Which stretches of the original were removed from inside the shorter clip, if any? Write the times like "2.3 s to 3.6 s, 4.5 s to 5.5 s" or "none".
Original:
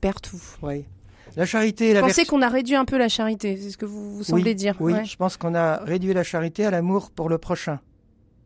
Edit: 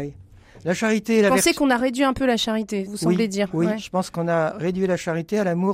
3.6 s to 4.1 s